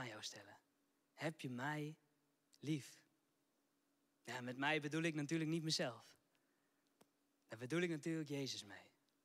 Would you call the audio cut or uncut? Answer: cut